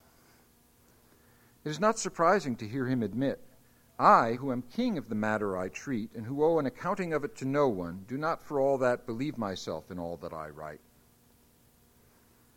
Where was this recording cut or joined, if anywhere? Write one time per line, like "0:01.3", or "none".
none